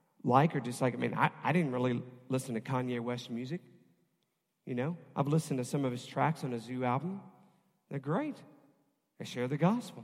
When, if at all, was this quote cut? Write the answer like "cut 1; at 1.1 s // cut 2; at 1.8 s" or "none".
none